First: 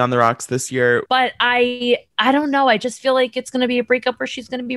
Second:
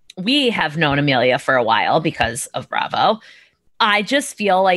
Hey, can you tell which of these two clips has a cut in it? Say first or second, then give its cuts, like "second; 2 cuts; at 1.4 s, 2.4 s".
first; 1 cut; at 1.1 s